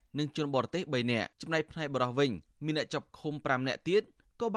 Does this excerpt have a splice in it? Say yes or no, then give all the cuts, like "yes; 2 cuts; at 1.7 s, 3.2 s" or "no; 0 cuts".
yes; 1 cut; at 1.3 s